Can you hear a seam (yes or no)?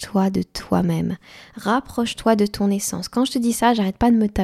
no